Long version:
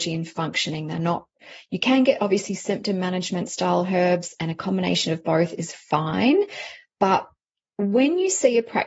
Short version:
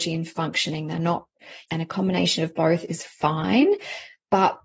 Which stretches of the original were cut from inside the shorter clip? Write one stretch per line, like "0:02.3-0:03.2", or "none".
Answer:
0:01.7-0:04.4